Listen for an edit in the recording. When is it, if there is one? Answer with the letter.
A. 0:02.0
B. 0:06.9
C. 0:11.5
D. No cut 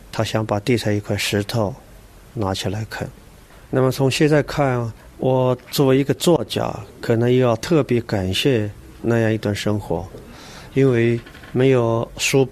C